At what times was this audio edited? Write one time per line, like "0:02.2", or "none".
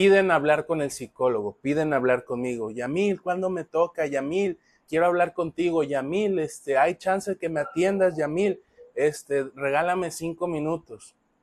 0:04.9

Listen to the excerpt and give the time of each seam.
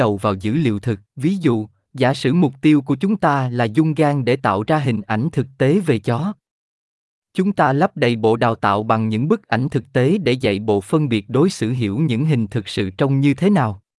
0:01.1

